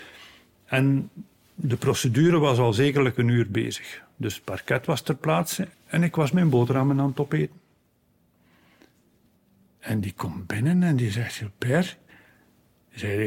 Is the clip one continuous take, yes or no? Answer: no